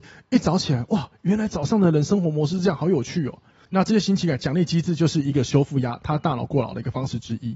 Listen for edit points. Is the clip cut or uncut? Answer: cut